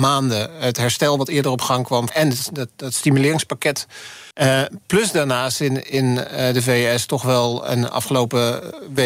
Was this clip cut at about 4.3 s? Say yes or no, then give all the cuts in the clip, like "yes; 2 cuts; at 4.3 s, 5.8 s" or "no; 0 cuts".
yes; 2 cuts; at 2.1 s, 4.3 s